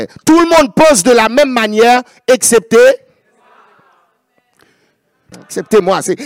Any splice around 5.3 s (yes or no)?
yes